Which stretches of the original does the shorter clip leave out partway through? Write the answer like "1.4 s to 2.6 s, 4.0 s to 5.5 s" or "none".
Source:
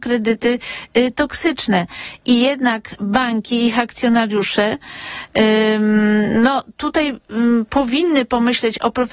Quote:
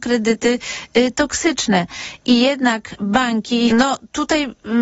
3.7 s to 6.3 s